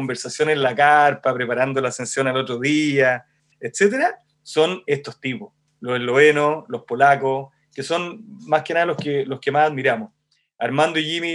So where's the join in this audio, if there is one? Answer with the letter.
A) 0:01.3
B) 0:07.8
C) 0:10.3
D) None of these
D